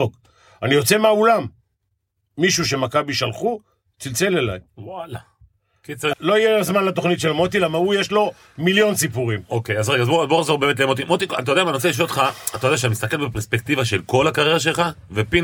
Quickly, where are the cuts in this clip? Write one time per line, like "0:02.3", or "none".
0:06.1